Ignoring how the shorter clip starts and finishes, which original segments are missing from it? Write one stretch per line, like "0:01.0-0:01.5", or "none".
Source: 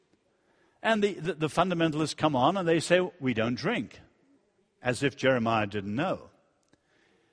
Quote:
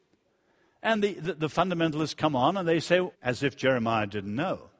0:03.1-0:04.7